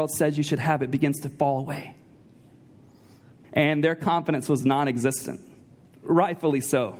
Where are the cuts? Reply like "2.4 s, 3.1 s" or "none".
3.4 s